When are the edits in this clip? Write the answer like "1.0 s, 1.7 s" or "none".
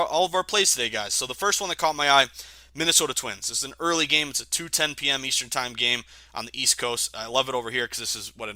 none